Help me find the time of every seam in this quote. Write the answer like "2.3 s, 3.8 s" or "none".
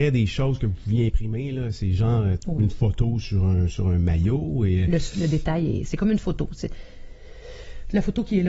2.4 s

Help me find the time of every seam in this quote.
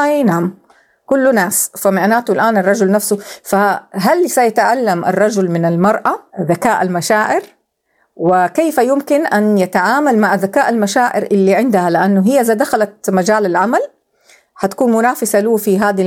6.3 s

